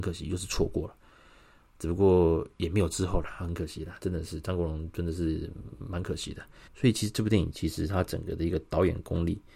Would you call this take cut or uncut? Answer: cut